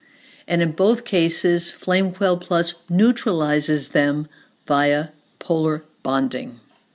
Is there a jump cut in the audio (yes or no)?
no